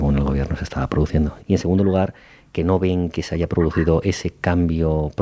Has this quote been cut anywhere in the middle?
yes; 1 cut; at 1.4 s

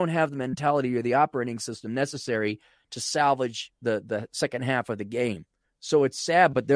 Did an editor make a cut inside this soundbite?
no; 0 cuts

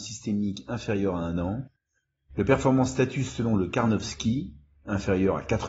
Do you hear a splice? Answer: no; 0 cuts

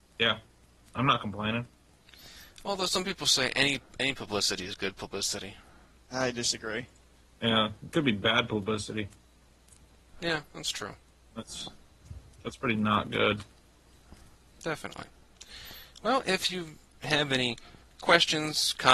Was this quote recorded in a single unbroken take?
yes; 0 cuts

